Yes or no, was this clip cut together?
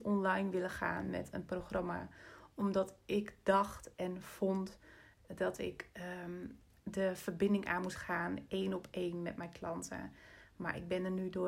no